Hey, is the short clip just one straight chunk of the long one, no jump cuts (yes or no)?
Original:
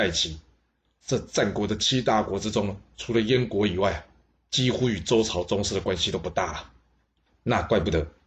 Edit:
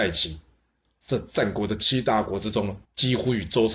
no